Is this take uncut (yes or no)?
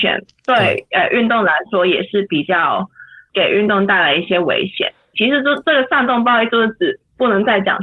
no